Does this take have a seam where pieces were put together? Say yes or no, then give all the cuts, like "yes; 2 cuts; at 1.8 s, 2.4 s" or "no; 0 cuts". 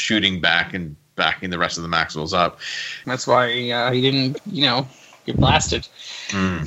yes; 1 cut; at 3.0 s